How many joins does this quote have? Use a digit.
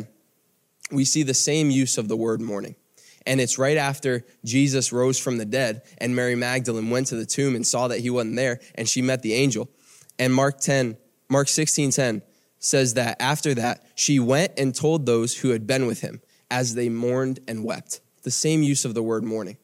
0